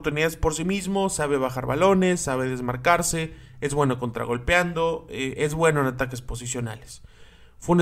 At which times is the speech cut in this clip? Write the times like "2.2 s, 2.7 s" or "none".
none